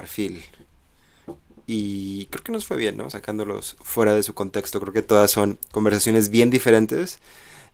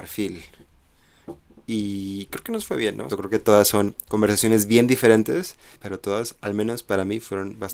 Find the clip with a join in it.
second; 2 cuts; at 3.1 s, 5.7 s

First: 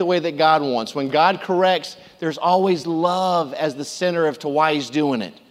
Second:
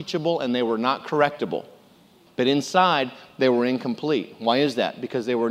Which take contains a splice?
second; 1 cut; at 2.3 s

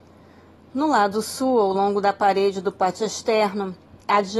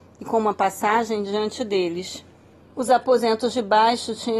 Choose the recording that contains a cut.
second; 1 cut; at 2.7 s

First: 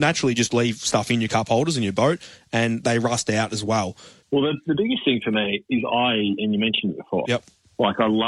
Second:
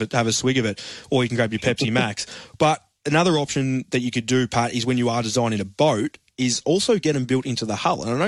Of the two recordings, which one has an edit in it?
first; 2 cuts; at 4.2 s, 7.3 s

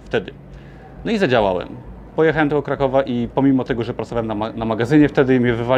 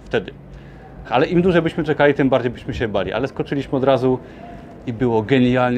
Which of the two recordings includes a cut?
second; 1 cut; at 1.0 s

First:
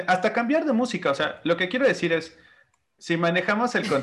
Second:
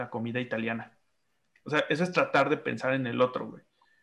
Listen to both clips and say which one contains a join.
first; 1 cut; at 3.0 s

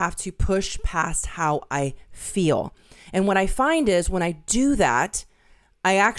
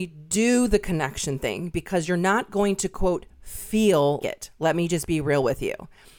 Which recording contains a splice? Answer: second; 1 cut; at 4.2 s

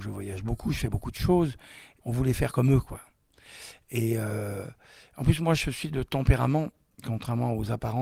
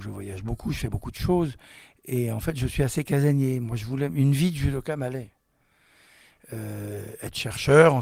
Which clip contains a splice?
first; 1 cut; at 2.0 s

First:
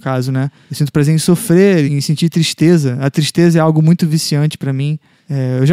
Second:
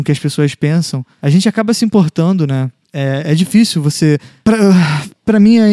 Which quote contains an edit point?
first; 1 cut; at 1.9 s

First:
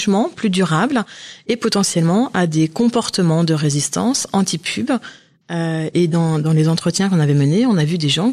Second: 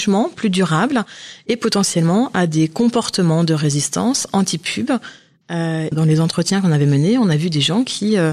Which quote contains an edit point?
second; 1 cut; at 5.9 s

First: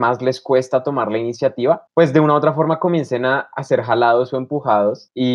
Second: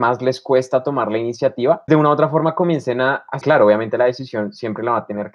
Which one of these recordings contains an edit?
second; 2 cuts; at 1.9 s, 3.4 s

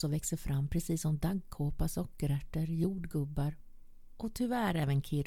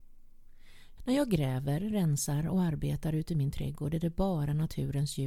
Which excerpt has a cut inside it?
second; 1 cut; at 1.0 s

